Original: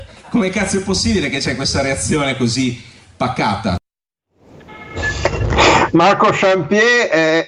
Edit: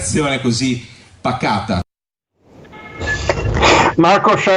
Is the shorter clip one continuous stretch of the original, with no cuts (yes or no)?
yes